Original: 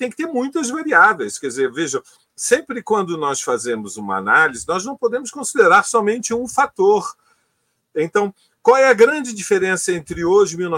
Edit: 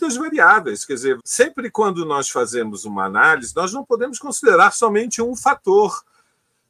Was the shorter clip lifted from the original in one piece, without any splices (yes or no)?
no